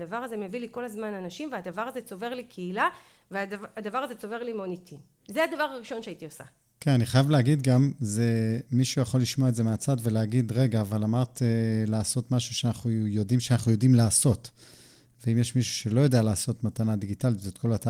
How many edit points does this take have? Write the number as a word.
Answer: zero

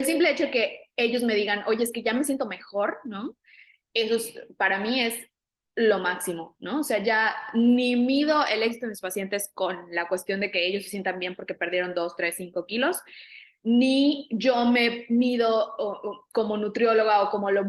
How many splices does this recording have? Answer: zero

